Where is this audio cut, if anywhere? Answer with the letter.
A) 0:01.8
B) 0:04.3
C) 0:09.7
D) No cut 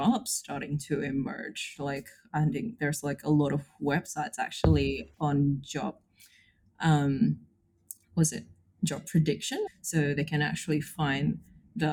C